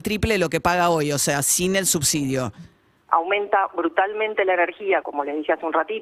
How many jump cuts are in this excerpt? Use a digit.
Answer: 2